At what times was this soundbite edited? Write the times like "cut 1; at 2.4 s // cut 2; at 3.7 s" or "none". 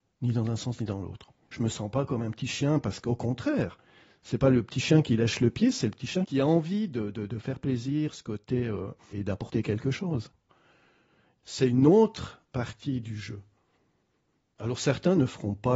cut 1; at 9.1 s